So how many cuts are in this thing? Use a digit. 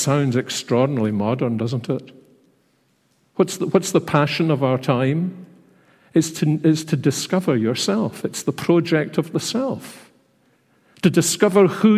0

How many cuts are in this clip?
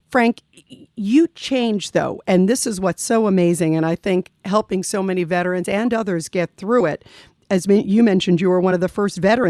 0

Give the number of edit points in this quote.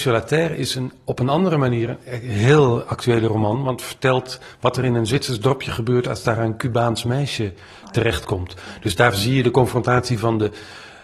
0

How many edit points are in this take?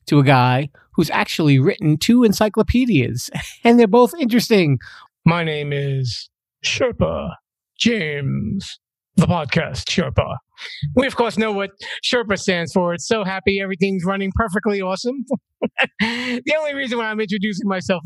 1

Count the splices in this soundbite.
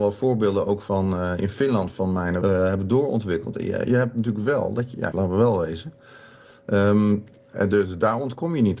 3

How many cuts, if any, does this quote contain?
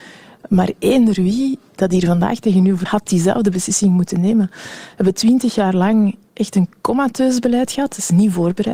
1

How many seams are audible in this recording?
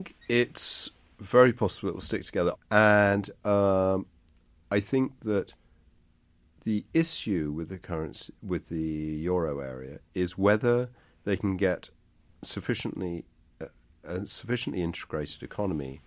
1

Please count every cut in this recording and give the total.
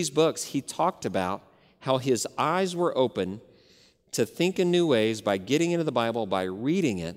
0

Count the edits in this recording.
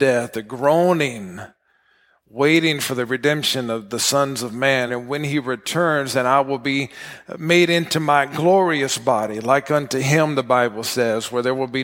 1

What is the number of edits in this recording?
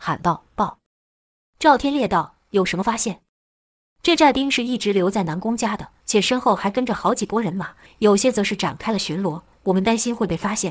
2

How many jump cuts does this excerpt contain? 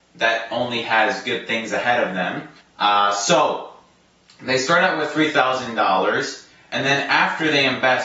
1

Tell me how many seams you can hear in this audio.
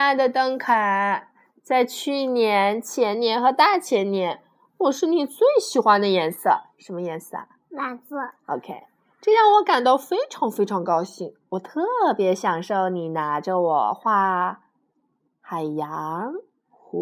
0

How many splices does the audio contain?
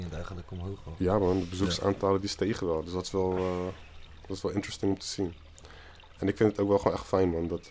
0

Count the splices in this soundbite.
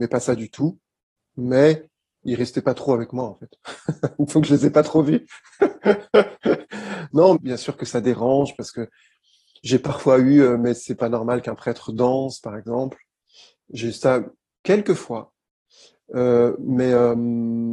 1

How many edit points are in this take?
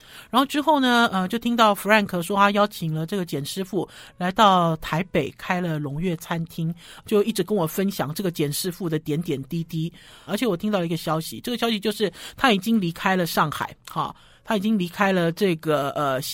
2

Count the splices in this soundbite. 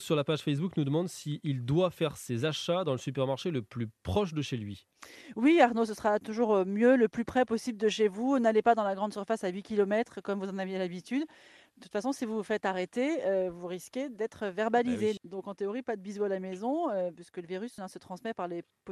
2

